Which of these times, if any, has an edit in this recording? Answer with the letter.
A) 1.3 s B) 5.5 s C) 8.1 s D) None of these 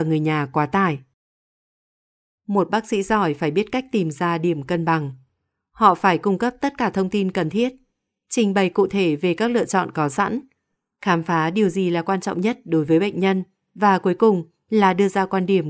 D